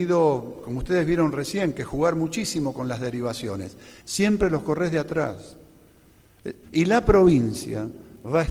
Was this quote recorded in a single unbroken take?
no; 2 cuts; at 4.0 s, 6.6 s

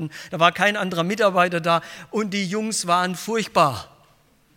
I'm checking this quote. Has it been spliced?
no; 0 cuts

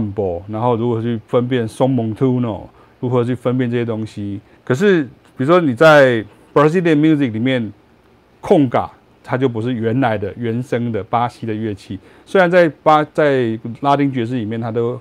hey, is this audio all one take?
no; 1 cut; at 4.6 s

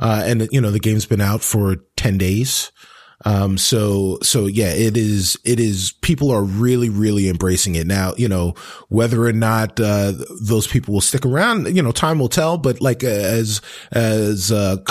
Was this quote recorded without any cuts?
yes; 0 cuts

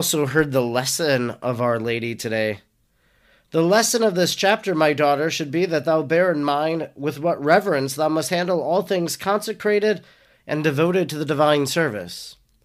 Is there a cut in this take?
no; 0 cuts

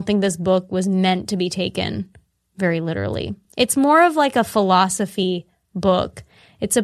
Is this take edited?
no; 0 cuts

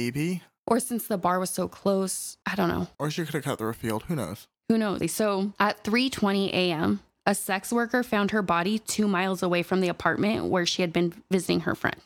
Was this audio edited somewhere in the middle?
yes; 1 cut; at 5.0 s

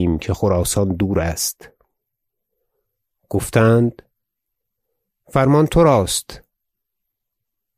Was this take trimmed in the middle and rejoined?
no; 0 cuts

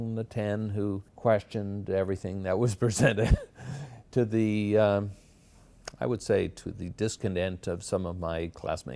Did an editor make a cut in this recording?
yes; 1 cut; at 1.1 s

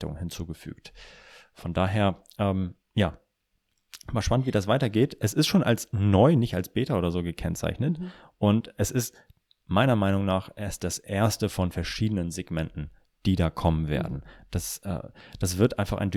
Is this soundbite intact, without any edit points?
yes; 0 cuts

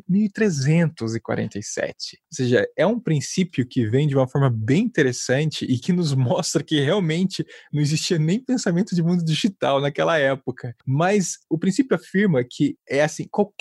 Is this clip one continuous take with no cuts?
yes; 0 cuts

